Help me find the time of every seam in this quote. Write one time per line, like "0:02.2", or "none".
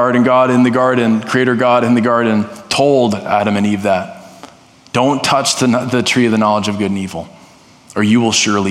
none